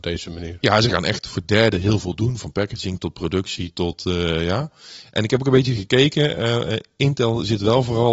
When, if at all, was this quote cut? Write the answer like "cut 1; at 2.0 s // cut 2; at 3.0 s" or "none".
none